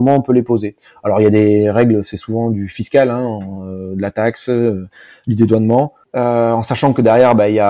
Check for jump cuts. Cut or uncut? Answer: cut